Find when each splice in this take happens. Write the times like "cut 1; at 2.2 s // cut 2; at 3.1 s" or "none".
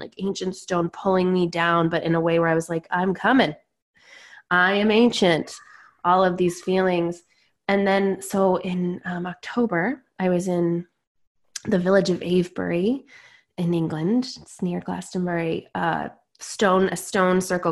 none